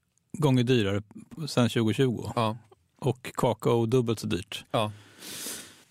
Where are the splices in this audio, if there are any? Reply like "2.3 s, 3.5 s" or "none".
none